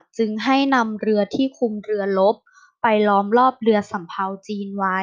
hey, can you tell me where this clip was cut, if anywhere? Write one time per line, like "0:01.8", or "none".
none